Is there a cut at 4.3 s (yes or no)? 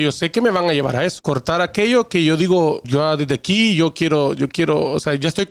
no